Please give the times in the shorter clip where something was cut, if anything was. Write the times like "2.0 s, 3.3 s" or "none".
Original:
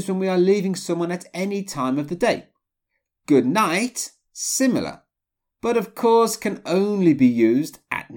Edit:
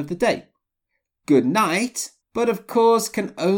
2.2 s